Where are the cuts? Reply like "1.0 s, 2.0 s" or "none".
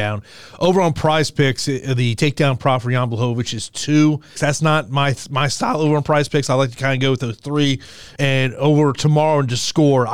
4.4 s, 8.2 s